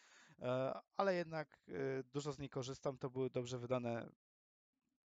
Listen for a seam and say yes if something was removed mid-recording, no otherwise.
no